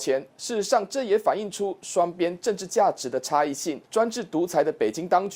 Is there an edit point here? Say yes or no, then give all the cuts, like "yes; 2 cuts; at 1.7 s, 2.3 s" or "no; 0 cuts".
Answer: no; 0 cuts